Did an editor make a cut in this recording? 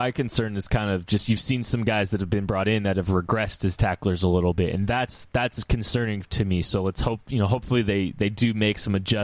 no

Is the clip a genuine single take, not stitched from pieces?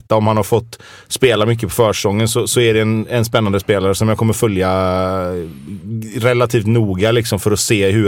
yes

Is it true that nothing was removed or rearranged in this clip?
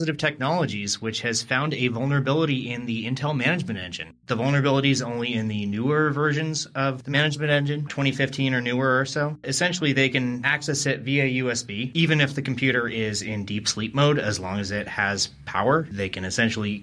no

